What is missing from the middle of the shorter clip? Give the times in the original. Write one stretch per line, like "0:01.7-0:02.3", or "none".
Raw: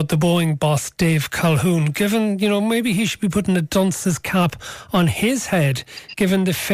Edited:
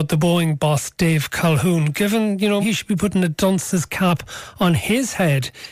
0:02.6-0:02.9